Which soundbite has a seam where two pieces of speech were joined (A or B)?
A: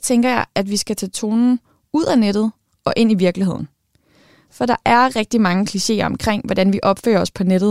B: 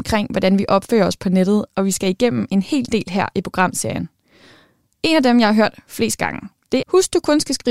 B